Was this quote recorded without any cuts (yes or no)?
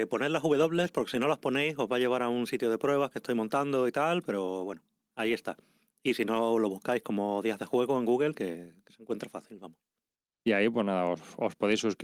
yes